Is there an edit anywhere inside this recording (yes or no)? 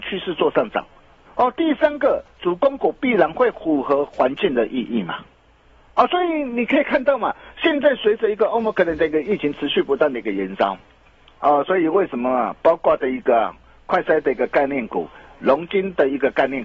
yes